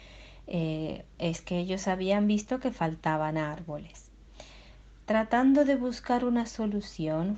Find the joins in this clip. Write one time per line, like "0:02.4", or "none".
0:01.1